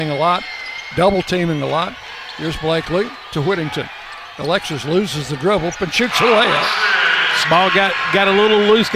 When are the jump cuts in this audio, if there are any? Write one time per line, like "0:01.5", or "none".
0:05.8
0:07.4